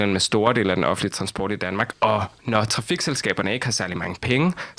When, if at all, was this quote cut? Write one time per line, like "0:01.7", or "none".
0:01.9